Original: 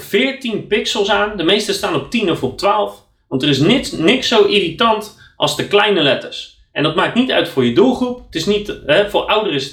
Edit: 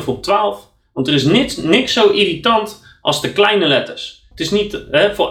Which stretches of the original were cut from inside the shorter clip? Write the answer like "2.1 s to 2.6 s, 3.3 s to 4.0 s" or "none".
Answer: 6.7 s to 8.3 s